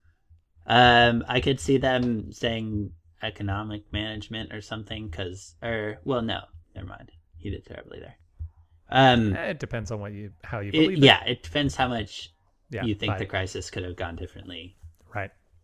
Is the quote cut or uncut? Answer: cut